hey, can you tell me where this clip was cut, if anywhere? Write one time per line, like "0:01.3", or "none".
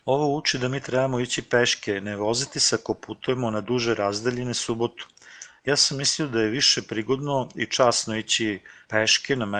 none